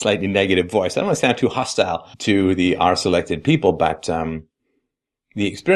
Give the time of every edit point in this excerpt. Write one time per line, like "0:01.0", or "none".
0:02.1